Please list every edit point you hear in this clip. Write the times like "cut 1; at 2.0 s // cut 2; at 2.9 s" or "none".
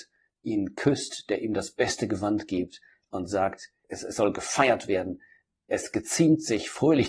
none